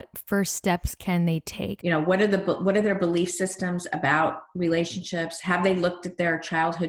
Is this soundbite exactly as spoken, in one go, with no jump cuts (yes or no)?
no